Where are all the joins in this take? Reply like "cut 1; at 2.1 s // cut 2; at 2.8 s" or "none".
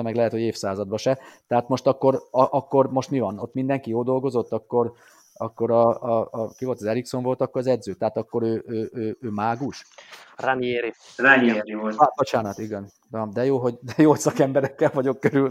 none